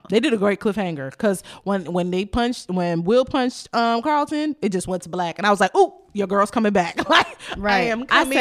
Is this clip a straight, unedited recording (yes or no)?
yes